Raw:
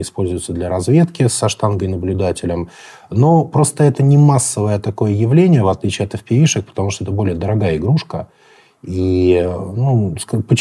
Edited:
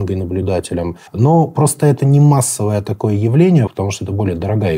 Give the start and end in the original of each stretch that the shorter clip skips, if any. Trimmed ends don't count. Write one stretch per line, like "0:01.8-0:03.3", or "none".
0:02.8-0:03.0
0:05.6-0:06.7